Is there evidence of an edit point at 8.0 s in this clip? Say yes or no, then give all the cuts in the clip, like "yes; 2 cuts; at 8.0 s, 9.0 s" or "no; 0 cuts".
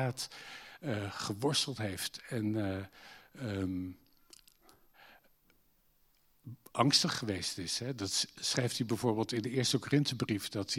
no; 0 cuts